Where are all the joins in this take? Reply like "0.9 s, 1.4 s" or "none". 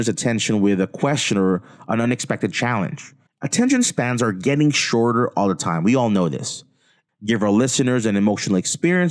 3.3 s, 7.1 s